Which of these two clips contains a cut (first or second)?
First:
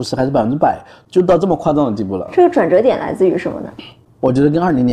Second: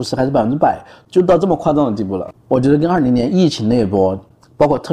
second